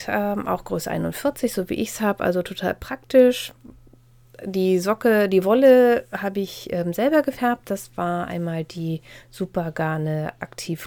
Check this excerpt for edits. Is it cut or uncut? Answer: uncut